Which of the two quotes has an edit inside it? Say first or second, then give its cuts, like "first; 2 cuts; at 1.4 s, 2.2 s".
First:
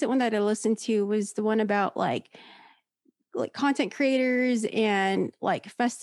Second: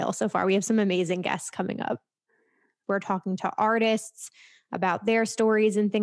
second; 1 cut; at 2.8 s